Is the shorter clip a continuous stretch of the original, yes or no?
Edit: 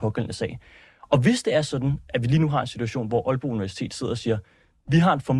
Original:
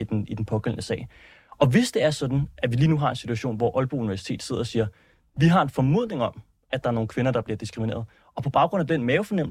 yes